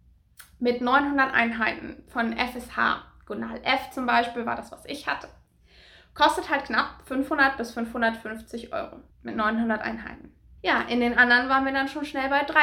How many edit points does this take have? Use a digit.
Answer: 2